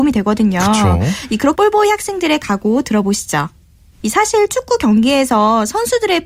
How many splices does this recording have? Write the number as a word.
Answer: two